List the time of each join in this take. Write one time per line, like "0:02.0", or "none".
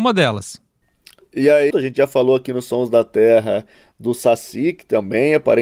0:01.7